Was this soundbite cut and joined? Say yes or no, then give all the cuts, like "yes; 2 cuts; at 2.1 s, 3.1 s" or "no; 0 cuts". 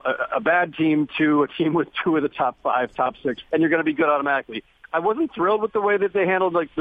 yes; 1 cut; at 3.4 s